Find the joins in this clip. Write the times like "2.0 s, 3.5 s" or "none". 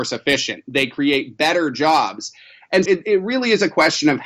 2.8 s